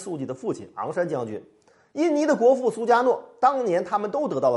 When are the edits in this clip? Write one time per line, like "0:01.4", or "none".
none